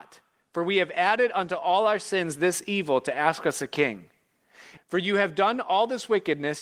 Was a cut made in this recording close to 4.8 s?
yes; 1 cut; at 4.8 s

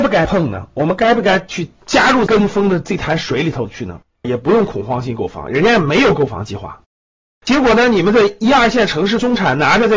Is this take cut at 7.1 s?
no; 1 cut; at 4.2 s

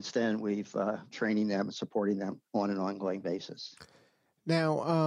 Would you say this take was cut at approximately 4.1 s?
no; 2 cuts; at 1.1 s, 2.5 s

